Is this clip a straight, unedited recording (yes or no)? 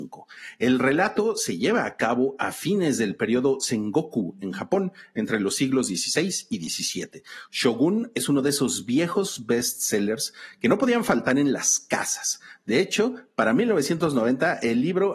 yes